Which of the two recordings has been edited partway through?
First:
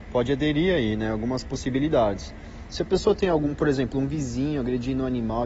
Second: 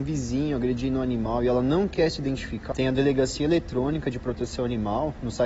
second; 1 cut; at 2.7 s

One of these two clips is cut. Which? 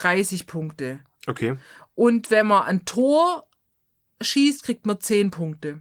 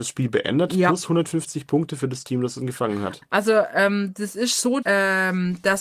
second; 2 cuts; at 3.2 s, 4.8 s

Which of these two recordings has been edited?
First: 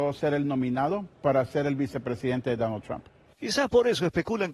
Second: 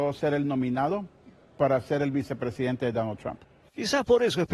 first; 1 cut; at 1.1 s

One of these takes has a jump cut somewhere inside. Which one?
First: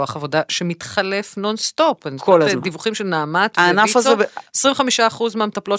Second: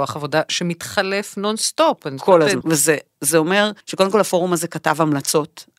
second; 2 cuts; at 2.6 s, 3.8 s

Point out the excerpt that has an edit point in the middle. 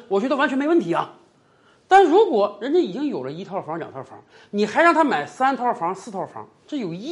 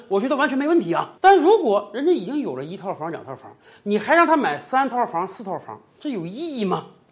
second; 1 cut; at 1.2 s

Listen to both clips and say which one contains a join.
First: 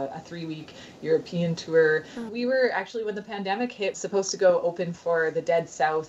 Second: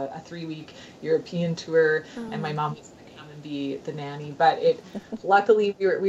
first; 2 cuts; at 2.3 s, 3.9 s

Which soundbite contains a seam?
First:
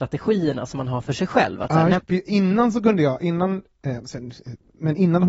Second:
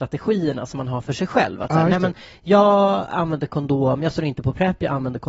first; 1 cut; at 2.0 s

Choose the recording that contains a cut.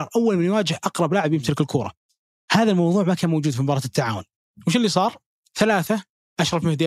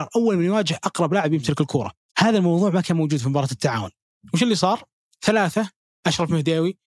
second; 1 cut; at 2.1 s

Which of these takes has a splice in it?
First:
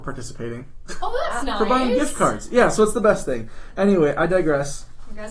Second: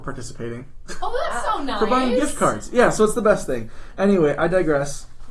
first; 1 cut; at 1.4 s

